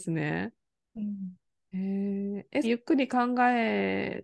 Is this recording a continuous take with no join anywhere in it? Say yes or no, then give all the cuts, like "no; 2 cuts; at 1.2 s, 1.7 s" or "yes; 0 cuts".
no; 1 cut; at 2.6 s